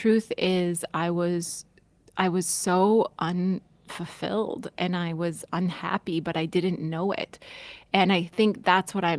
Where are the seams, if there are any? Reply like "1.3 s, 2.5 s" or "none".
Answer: none